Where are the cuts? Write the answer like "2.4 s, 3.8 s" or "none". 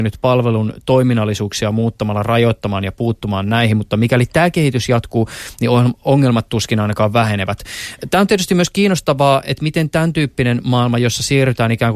none